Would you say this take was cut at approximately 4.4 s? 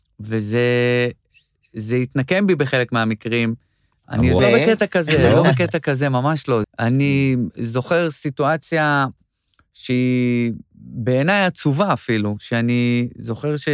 yes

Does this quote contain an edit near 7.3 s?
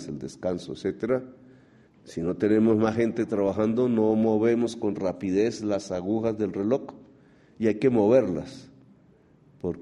no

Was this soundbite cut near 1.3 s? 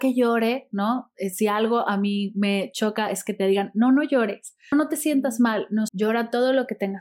no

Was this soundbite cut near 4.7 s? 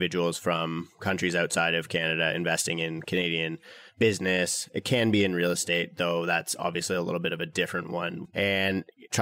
no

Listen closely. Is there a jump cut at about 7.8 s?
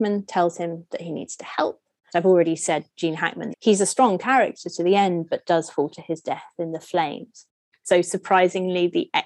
yes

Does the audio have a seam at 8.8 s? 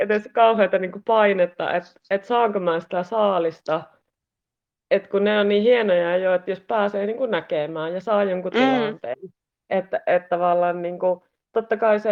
no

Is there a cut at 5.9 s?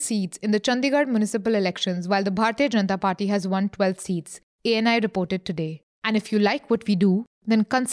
yes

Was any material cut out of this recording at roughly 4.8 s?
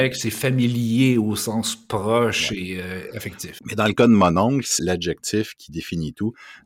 yes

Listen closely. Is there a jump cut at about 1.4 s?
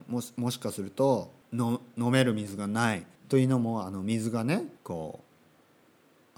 yes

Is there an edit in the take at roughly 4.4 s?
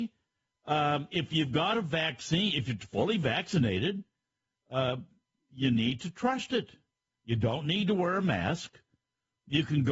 no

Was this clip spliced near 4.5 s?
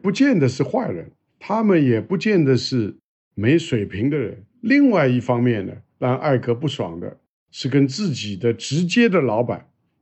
yes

